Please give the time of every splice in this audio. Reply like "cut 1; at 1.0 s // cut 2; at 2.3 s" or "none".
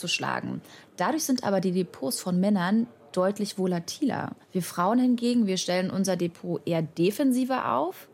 cut 1; at 4.4 s

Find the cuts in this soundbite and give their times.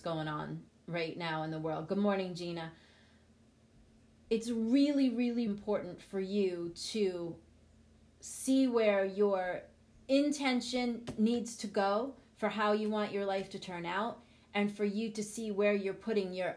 cut 1; at 5.5 s

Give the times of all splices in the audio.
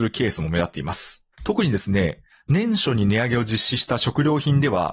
cut 1; at 1.3 s

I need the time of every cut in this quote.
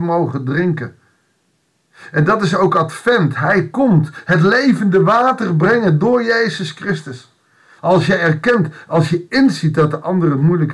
cut 1; at 7.8 s

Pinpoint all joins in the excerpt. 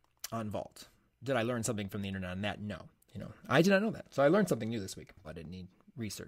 cut 1; at 3.1 s // cut 2; at 5.2 s

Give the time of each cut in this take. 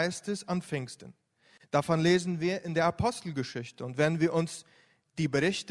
none

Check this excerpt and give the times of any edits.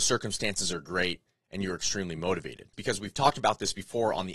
cut 1; at 2.7 s

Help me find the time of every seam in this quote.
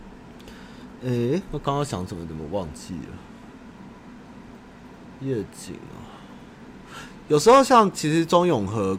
none

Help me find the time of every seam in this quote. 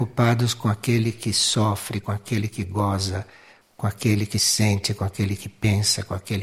none

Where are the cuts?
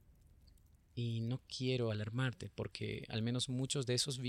none

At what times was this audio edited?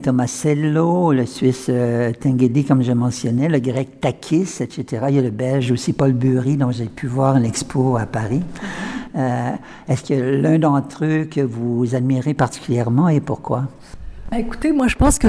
none

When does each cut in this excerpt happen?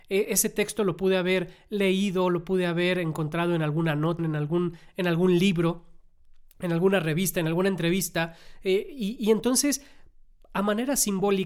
cut 1; at 4.2 s

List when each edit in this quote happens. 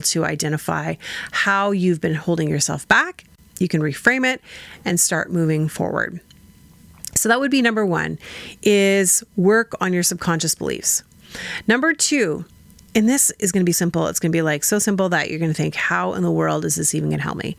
cut 1; at 13.7 s

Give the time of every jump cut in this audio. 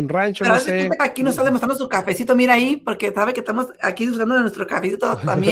cut 1; at 1.0 s

